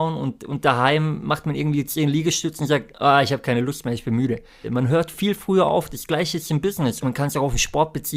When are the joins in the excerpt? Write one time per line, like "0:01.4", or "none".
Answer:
0:04.6
0:07.0